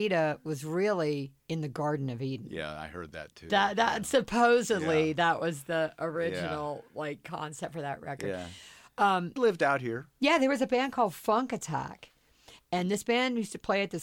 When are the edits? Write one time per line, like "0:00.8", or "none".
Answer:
0:09.4